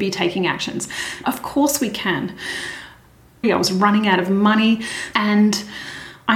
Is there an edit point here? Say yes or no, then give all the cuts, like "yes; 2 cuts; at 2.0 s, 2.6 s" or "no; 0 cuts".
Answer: yes; 3 cuts; at 1.2 s, 3.4 s, 5.1 s